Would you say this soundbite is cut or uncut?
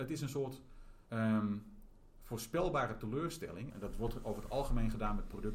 cut